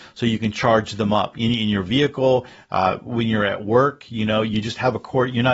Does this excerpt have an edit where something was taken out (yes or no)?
no